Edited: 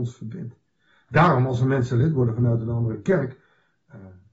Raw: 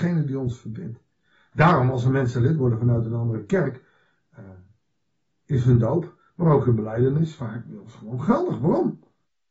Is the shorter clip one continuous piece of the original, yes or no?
yes